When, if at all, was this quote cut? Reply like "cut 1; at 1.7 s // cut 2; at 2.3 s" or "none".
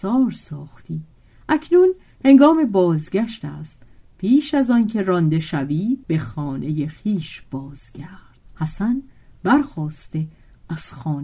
cut 1; at 6.0 s // cut 2; at 8.5 s